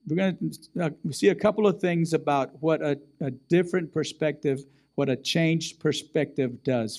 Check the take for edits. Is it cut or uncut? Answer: uncut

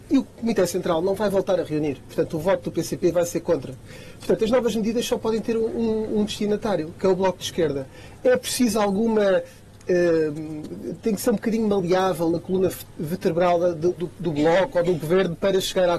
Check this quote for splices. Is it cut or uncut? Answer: uncut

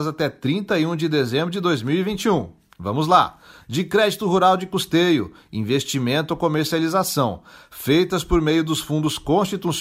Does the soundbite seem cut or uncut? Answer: uncut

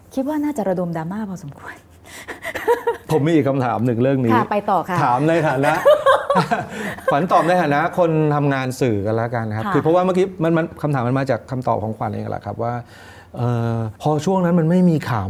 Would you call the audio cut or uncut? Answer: cut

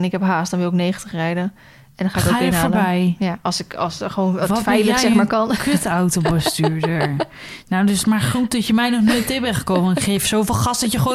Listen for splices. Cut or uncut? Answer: uncut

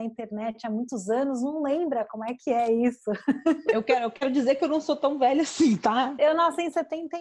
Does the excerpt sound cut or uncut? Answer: uncut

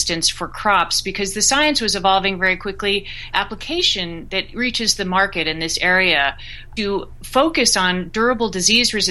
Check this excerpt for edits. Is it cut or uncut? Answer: cut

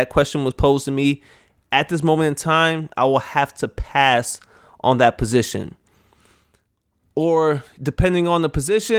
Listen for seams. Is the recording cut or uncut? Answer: uncut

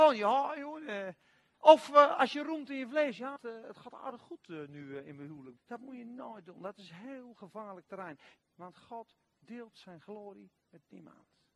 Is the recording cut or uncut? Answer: cut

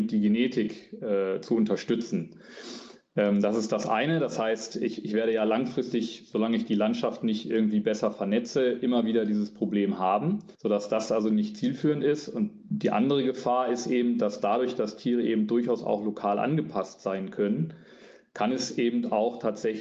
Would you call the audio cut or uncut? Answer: cut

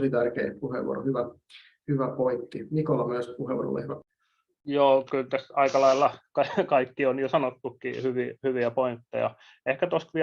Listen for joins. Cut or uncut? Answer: uncut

